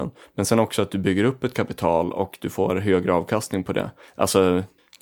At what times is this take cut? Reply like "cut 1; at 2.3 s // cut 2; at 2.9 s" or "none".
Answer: none